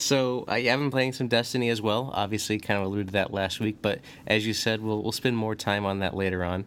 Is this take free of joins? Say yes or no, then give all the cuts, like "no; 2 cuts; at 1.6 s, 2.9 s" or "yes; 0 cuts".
yes; 0 cuts